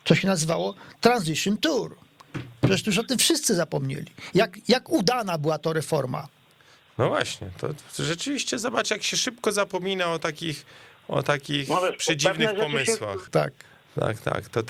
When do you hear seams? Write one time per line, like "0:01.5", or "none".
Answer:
0:13.3